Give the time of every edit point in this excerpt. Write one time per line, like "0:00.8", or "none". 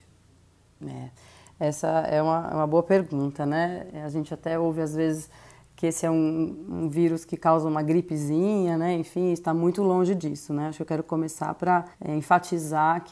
0:11.9